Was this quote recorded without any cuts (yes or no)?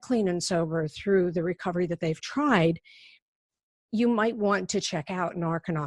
yes